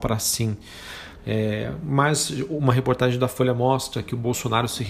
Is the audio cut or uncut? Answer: cut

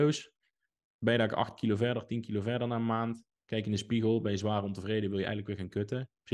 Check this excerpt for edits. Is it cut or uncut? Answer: uncut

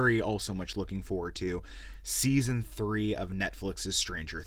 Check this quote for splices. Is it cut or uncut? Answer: uncut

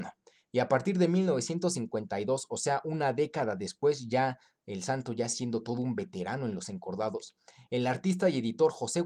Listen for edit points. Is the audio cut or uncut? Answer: uncut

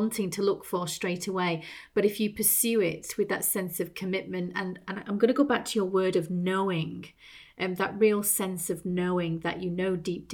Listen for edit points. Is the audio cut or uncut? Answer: uncut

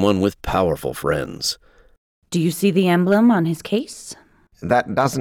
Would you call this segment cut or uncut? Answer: uncut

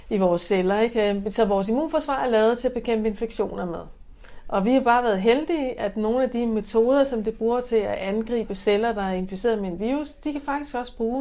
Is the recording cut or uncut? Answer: uncut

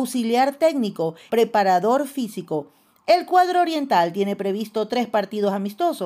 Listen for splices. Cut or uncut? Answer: cut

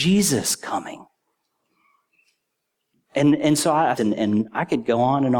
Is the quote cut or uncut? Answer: cut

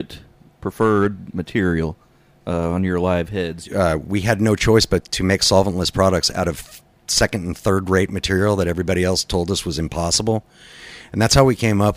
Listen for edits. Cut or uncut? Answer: cut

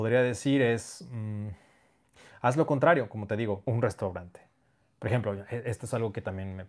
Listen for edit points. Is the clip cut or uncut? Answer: cut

